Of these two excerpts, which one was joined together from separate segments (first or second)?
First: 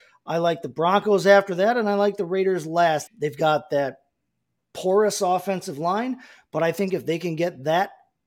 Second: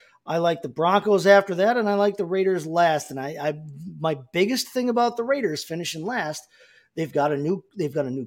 first